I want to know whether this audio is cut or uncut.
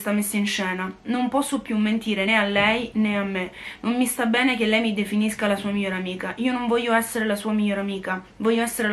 cut